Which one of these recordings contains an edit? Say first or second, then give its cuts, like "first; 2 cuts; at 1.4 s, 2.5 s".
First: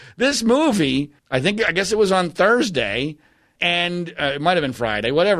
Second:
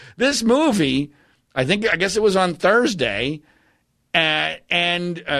first; 2 cuts; at 1.2 s, 3.6 s